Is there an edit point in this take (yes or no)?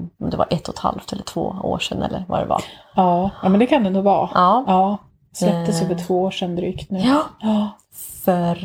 no